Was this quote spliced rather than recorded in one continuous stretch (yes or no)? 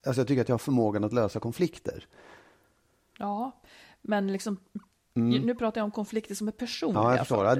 no